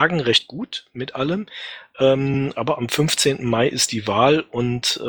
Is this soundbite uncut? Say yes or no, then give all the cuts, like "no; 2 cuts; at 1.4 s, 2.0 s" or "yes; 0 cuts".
yes; 0 cuts